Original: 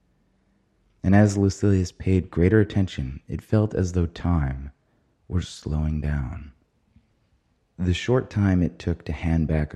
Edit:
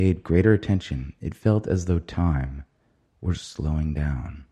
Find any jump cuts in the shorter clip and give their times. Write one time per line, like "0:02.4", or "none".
none